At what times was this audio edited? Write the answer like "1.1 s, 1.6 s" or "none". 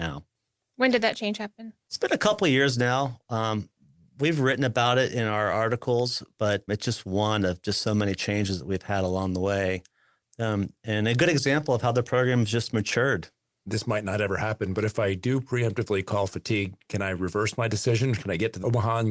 6.7 s